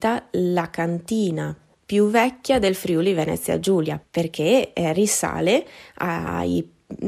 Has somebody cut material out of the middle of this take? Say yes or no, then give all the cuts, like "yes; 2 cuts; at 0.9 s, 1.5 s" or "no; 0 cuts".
yes; 1 cut; at 4.0 s